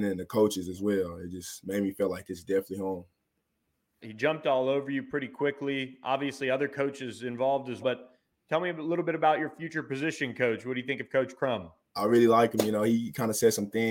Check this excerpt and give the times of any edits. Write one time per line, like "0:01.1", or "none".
0:04.0
0:07.8